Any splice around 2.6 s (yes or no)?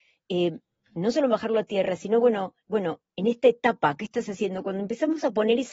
yes